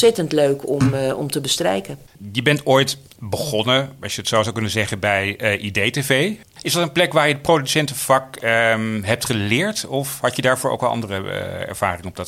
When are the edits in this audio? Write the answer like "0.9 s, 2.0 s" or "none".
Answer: none